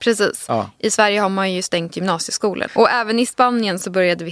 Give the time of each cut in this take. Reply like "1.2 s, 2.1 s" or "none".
2.7 s